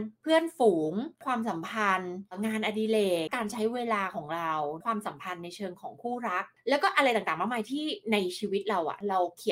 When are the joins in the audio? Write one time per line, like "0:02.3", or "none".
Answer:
0:03.3